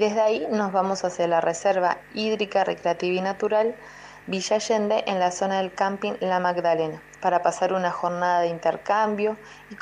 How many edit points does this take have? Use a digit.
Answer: 1